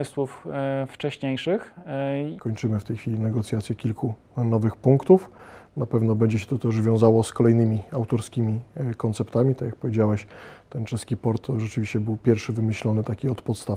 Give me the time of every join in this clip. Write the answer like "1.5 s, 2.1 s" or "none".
2.4 s